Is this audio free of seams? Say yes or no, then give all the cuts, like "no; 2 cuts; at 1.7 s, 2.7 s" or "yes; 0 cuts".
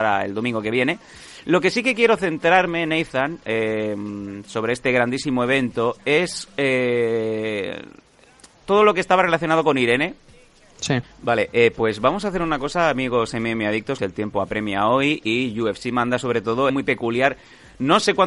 no; 3 cuts; at 11.0 s, 14.0 s, 16.7 s